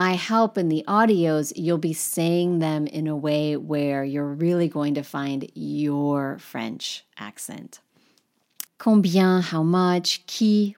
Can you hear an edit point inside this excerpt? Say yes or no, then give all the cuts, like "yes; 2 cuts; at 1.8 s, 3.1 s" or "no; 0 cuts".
yes; 1 cut; at 8.7 s